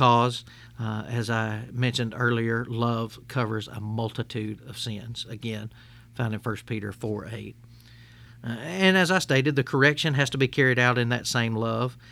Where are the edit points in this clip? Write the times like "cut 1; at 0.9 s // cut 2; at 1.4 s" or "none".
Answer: cut 1; at 8.3 s